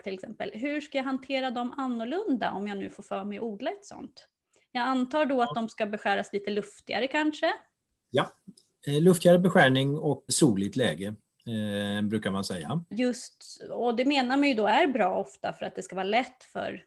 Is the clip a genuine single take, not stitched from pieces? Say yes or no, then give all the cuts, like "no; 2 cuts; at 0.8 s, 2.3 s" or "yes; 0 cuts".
no; 2 cuts; at 10.3 s, 12.9 s